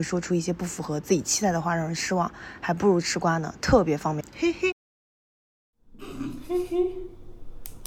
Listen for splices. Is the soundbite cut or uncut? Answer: cut